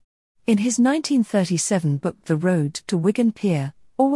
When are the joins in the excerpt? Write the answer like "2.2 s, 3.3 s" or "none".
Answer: none